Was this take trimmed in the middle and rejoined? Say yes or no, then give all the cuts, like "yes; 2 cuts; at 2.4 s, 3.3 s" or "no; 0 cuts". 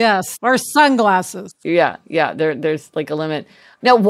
no; 0 cuts